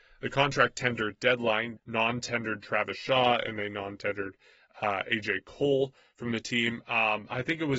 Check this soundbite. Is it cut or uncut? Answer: cut